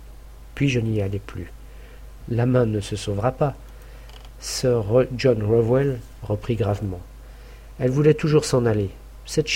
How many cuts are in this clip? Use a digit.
1